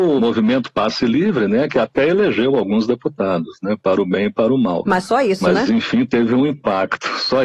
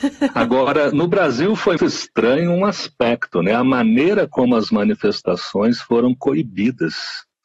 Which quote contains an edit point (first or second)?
second